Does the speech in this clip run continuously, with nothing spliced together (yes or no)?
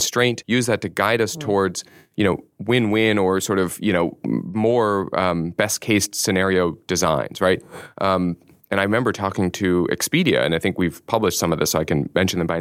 yes